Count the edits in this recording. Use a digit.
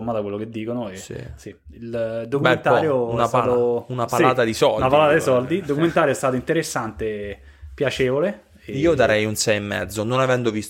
0